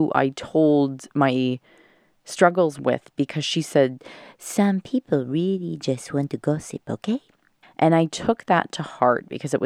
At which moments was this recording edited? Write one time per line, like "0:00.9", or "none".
0:07.6